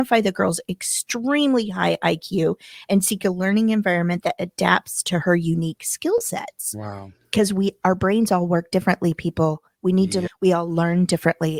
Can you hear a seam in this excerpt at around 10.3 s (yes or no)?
yes